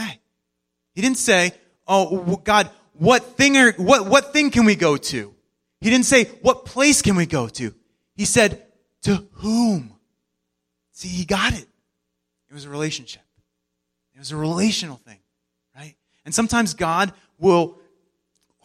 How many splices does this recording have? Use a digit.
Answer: 0